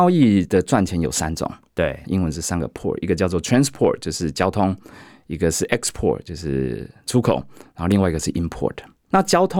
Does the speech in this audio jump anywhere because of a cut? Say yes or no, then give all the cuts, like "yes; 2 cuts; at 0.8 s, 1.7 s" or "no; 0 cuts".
yes; 1 cut; at 2.0 s